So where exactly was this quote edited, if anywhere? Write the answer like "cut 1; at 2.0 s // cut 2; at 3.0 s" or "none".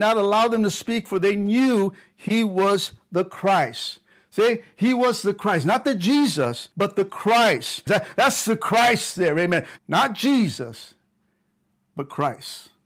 cut 1; at 6.7 s // cut 2; at 7.9 s // cut 3; at 9.8 s